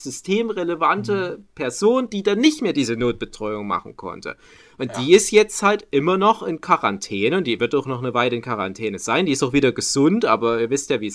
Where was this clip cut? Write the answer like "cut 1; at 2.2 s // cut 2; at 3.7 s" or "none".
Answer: none